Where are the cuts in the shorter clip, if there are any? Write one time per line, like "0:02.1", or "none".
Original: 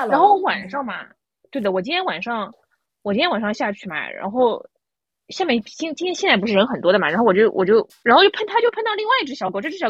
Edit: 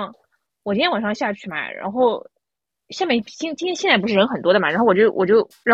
none

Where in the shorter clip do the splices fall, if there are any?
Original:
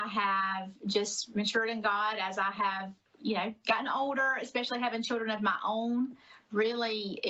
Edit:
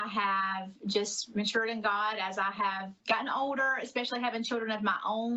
0:03.0

